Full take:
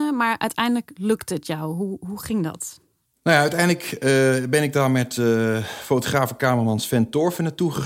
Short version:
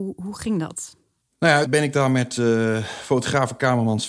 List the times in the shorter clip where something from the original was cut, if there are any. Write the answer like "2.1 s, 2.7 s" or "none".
1.7 s